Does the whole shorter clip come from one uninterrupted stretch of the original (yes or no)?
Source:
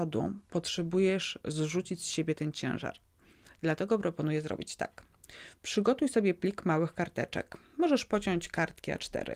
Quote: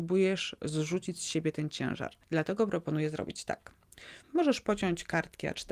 no